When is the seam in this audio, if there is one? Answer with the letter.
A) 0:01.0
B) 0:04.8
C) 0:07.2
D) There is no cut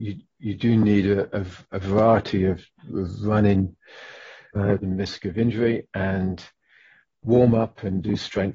B